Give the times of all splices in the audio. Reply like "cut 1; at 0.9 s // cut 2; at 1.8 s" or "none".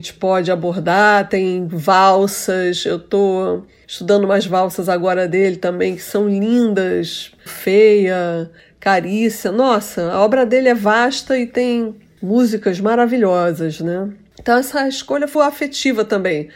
cut 1; at 7.5 s // cut 2; at 15.3 s

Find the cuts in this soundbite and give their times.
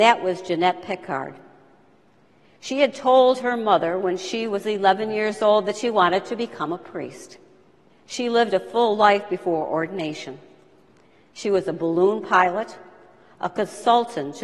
cut 1; at 7.9 s

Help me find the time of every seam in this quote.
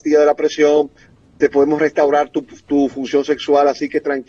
none

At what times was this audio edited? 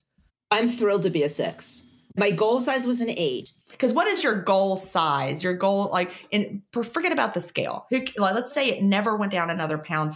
cut 1; at 3.6 s

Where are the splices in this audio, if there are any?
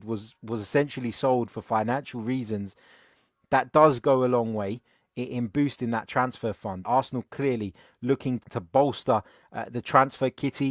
cut 1; at 6.8 s // cut 2; at 8.4 s

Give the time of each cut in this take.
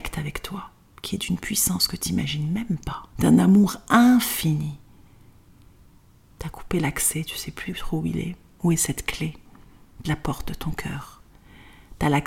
cut 1; at 3.1 s // cut 2; at 6.3 s

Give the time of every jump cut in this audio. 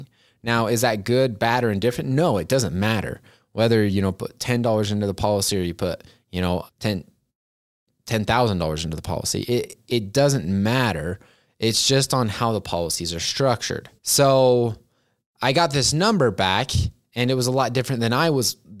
cut 1; at 6.7 s // cut 2; at 14.0 s

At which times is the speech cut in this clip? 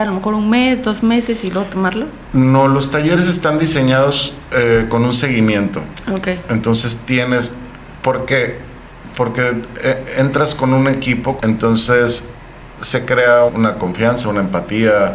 cut 1; at 11.4 s // cut 2; at 13.5 s

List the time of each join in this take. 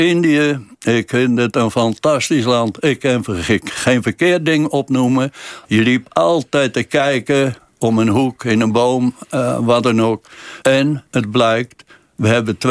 cut 1; at 5.6 s // cut 2; at 10.6 s

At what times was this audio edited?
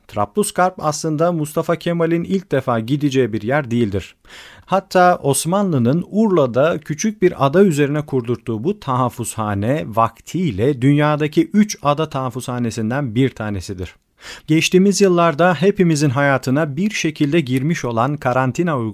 cut 1; at 4.6 s // cut 2; at 14.4 s

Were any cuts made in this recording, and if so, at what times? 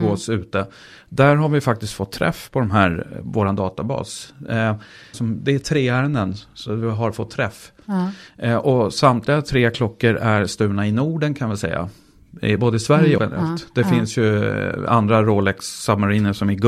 cut 1; at 5.1 s // cut 2; at 13.2 s

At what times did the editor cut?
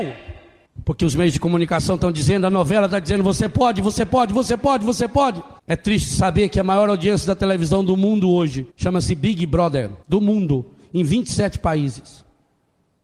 cut 1; at 5.6 s // cut 2; at 8.7 s // cut 3; at 10.0 s

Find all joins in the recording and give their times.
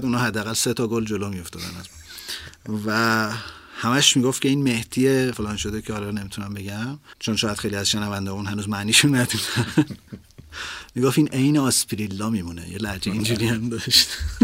cut 1; at 5.3 s

